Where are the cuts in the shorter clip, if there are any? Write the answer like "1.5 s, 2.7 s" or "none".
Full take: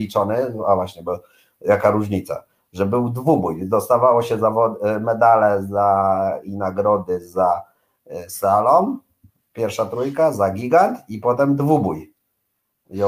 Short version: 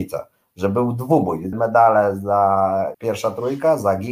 1.5 s, 2.9 s